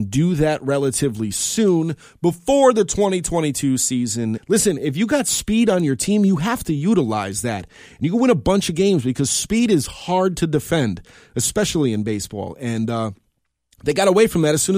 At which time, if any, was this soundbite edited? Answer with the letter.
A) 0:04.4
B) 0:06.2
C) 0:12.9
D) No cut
A